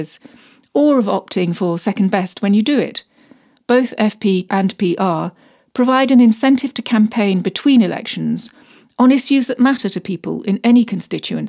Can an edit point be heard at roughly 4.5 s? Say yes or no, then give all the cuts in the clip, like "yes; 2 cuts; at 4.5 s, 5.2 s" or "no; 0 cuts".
yes; 1 cut; at 4.5 s